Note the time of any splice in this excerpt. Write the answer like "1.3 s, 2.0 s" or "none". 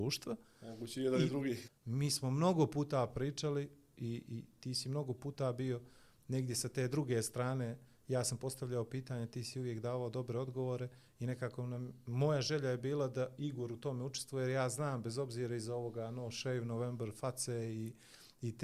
1.7 s